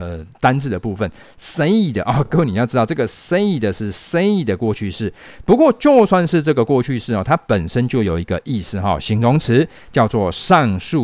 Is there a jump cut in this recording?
no; 0 cuts

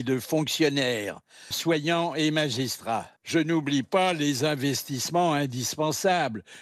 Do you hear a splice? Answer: yes; 2 cuts; at 1.5 s, 3.2 s

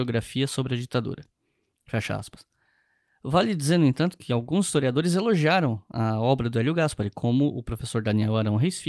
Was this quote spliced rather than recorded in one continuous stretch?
no; 0 cuts

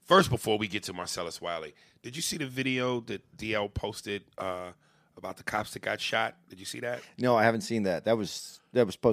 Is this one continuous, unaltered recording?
yes; 0 cuts

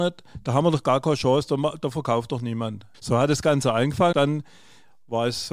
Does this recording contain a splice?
yes; 2 cuts; at 2.9 s, 4.1 s

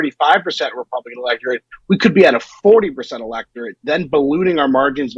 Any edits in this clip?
no; 0 cuts

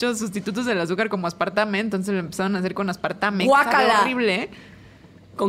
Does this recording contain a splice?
no; 0 cuts

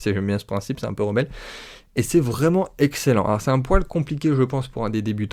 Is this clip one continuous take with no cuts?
yes; 0 cuts

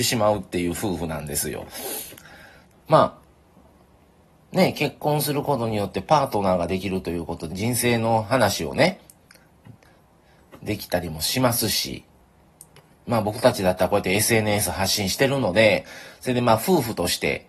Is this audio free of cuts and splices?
no; 2 cuts; at 2.7 s, 7.5 s

